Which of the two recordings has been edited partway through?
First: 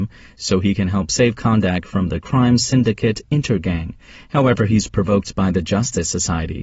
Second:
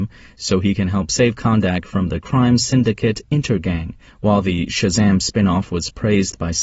second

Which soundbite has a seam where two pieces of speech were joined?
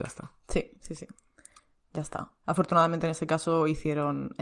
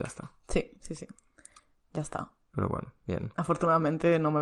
first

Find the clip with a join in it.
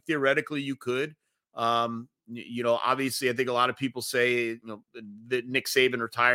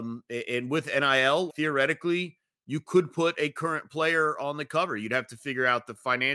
second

